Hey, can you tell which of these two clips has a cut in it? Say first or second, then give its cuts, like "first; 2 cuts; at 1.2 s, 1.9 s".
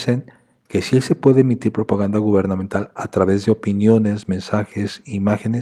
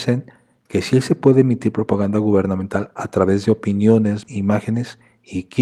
second; 1 cut; at 4.3 s